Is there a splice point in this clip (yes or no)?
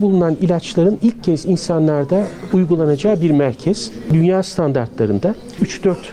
no